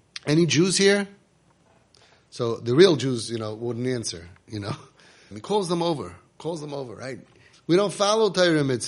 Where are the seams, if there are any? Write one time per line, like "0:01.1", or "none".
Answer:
0:05.3
0:07.5